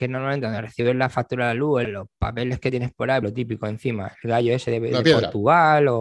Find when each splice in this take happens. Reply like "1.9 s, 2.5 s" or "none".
1.8 s, 3.2 s